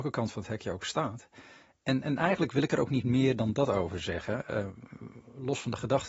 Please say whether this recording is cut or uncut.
uncut